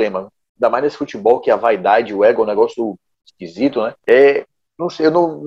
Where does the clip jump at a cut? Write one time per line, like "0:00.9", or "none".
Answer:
0:04.0